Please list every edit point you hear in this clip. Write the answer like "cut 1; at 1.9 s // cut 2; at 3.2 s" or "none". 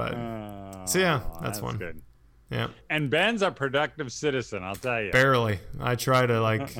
none